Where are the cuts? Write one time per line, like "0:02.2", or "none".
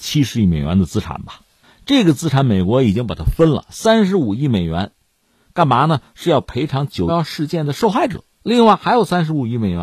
0:07.1